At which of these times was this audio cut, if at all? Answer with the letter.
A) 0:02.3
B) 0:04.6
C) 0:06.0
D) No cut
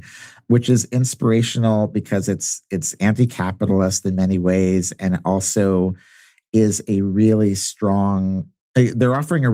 D